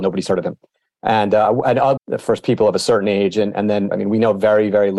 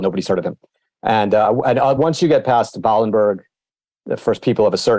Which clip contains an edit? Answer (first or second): first